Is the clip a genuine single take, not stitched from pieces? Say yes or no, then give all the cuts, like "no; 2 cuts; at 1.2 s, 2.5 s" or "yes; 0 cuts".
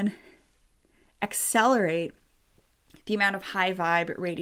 yes; 0 cuts